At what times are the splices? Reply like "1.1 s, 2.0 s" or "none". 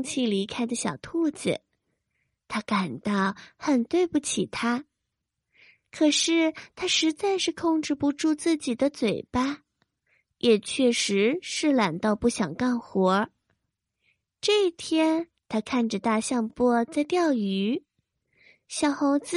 15.4 s, 16.5 s